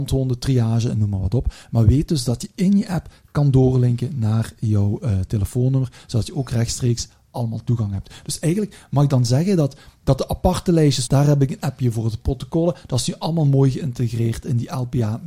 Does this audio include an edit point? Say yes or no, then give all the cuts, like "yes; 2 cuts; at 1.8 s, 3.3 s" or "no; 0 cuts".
yes; 1 cut; at 11.1 s